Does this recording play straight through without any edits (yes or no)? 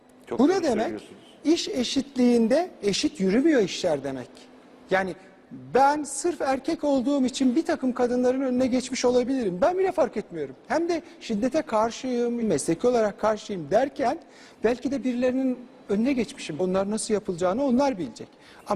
no